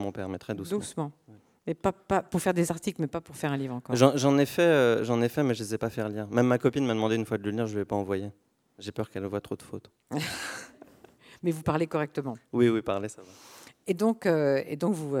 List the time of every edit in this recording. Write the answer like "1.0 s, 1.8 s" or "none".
none